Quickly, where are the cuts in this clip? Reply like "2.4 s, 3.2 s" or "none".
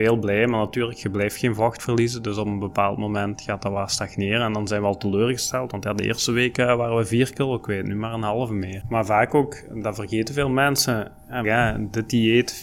8.8 s, 11.4 s